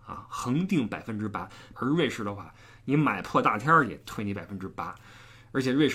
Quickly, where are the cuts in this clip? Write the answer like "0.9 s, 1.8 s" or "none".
1.7 s